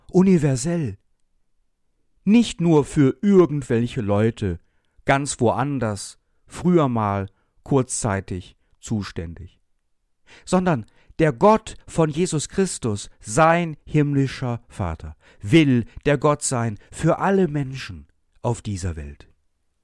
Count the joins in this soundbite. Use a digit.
0